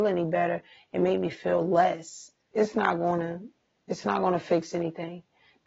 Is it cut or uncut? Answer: cut